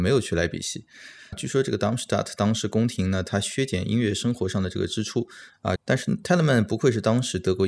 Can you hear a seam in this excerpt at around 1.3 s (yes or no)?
yes